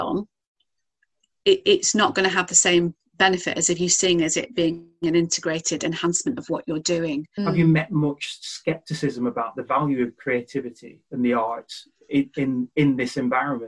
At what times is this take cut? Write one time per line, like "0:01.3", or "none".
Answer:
0:07.4